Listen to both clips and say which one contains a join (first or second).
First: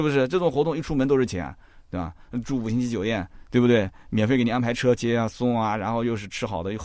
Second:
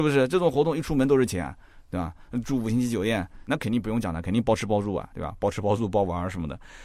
second